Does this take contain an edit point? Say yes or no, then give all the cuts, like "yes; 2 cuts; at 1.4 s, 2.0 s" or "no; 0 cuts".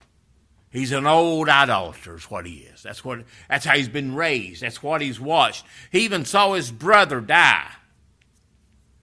no; 0 cuts